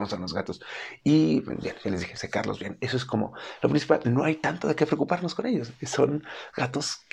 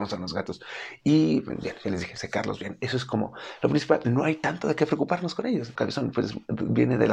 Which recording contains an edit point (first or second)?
second